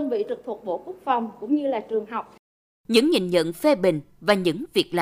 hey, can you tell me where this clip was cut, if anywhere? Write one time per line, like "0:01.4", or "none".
none